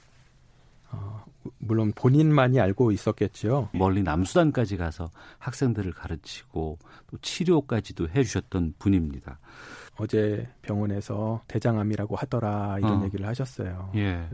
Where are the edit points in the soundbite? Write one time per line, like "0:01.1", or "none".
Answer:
0:03.7
0:09.9
0:11.5